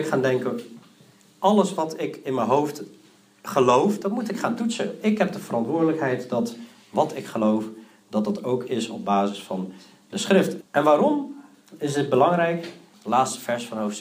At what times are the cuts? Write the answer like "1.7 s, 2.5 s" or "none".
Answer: 5.0 s, 10.6 s, 12.9 s